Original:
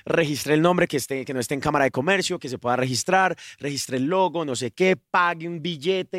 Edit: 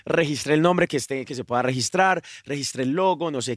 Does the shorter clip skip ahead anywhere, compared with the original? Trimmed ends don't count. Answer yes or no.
yes